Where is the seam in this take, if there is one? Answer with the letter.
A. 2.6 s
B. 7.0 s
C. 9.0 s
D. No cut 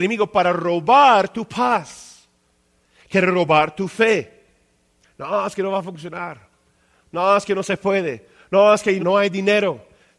C